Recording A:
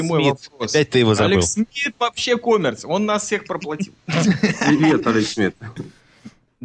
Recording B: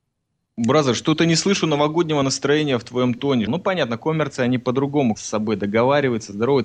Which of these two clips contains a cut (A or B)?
B